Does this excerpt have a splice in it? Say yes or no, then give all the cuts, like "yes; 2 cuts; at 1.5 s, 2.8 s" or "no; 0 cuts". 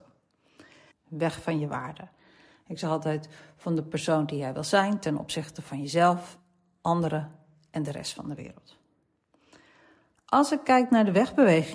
yes; 1 cut; at 0.9 s